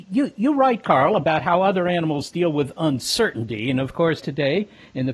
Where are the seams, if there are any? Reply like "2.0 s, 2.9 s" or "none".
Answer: 4.2 s